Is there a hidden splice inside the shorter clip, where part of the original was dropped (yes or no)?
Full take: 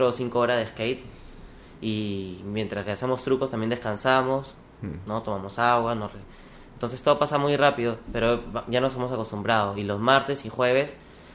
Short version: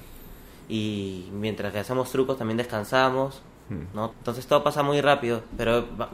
yes